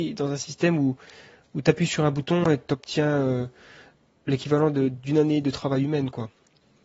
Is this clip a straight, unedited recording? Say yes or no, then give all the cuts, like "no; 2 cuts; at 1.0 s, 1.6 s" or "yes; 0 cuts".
yes; 0 cuts